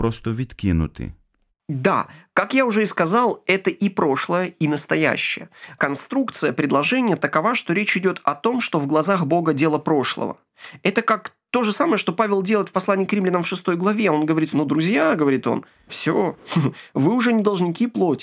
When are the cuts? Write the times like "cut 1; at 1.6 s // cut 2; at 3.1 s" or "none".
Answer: cut 1; at 14.5 s // cut 2; at 15.9 s